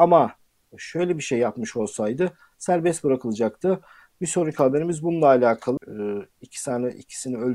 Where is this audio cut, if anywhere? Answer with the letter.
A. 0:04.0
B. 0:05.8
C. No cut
B